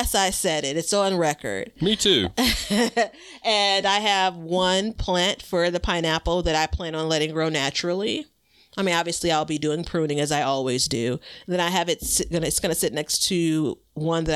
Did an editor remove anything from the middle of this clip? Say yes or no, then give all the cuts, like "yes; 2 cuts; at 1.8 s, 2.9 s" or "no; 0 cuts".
no; 0 cuts